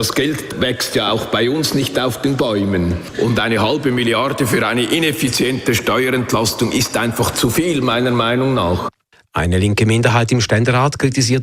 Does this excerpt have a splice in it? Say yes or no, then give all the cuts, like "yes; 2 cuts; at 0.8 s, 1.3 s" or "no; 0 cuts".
no; 0 cuts